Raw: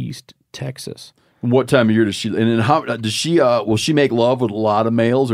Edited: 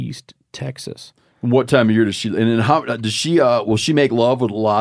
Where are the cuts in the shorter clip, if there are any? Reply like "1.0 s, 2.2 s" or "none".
none